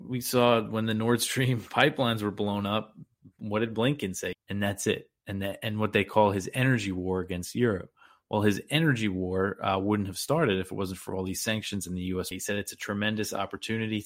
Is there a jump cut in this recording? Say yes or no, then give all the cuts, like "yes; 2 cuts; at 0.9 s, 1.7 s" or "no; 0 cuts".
yes; 2 cuts; at 4.3 s, 12.3 s